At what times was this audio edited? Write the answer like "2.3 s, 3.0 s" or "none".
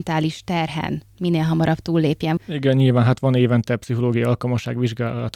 2.4 s